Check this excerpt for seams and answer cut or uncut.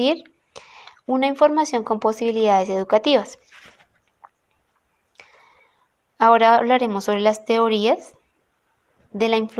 uncut